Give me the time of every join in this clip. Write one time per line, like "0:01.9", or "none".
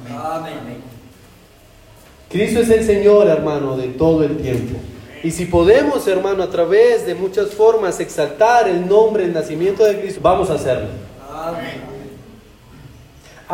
0:10.1